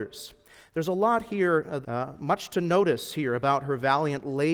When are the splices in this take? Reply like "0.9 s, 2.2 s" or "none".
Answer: 1.8 s